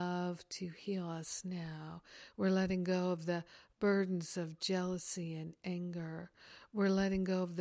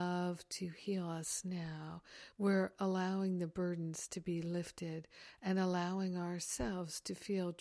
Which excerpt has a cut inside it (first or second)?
first